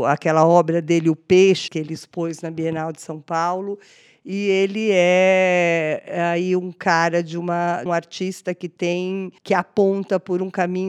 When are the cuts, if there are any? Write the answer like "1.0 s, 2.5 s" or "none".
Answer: 1.7 s, 7.9 s, 9.4 s

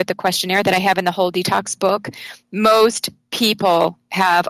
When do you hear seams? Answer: none

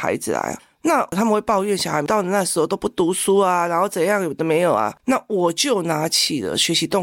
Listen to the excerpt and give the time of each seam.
5.0 s

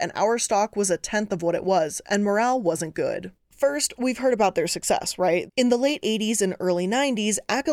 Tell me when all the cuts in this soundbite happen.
3.4 s, 5.5 s

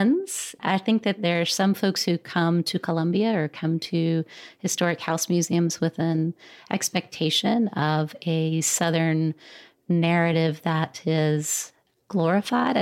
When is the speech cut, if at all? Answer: none

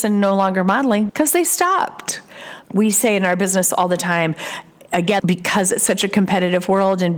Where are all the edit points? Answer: 1.1 s, 2.6 s, 5.2 s

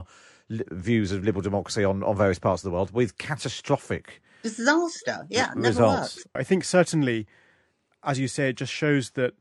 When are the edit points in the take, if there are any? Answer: 6.4 s

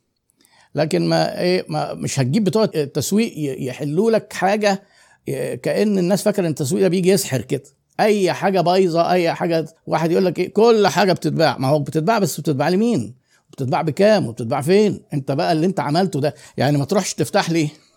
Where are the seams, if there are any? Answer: 9.8 s

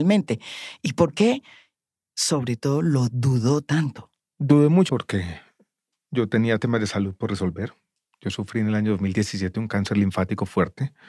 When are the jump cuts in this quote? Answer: 4.9 s

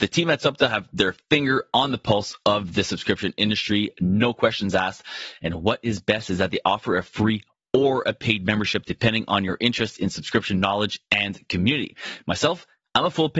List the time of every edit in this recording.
none

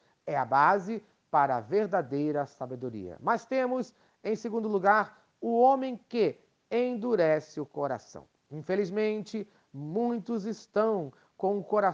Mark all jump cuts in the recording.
none

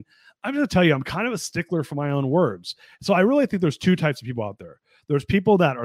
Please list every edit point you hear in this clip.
none

